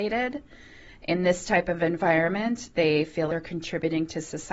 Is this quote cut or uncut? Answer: cut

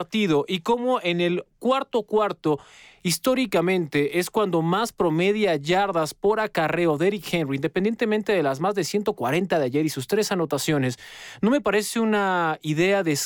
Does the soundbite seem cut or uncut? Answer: uncut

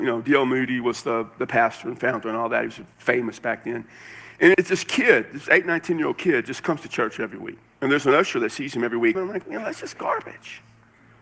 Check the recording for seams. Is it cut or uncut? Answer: cut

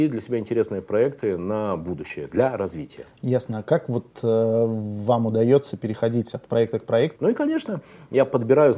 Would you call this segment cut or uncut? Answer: cut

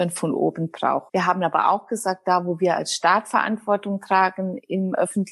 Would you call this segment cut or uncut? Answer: cut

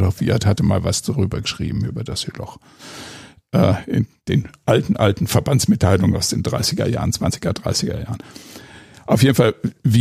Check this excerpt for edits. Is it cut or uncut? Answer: uncut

